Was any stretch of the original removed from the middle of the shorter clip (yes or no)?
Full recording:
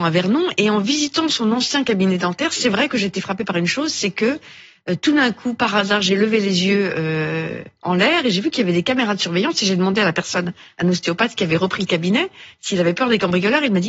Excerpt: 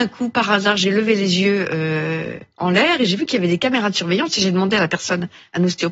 no